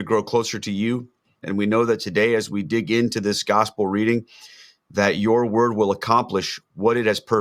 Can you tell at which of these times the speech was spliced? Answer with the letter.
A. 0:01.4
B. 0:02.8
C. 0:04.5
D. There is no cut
A